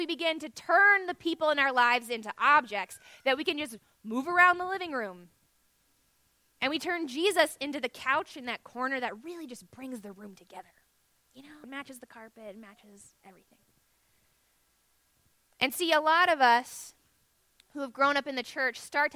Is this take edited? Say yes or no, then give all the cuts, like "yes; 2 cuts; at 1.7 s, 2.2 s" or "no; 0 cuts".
yes; 1 cut; at 11.6 s